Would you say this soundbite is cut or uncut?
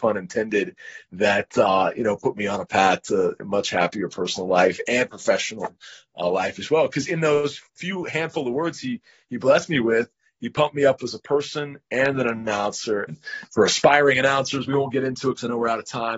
cut